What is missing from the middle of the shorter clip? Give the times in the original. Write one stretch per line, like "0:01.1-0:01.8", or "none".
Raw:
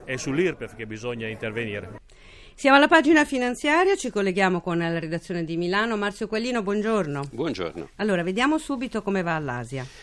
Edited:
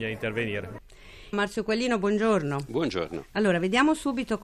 0:02.5-0:06.0